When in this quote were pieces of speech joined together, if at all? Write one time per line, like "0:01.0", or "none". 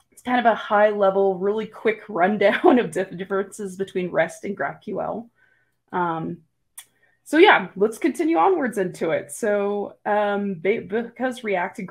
none